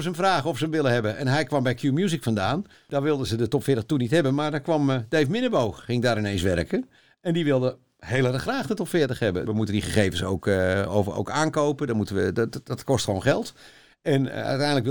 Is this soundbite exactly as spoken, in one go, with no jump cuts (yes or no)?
no